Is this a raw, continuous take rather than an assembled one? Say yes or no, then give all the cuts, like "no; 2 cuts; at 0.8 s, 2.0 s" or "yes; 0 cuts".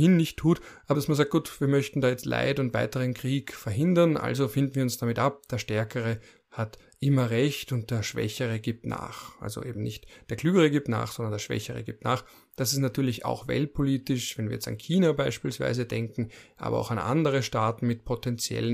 no; 1 cut; at 0.9 s